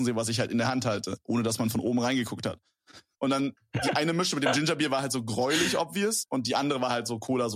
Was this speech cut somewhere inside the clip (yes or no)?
yes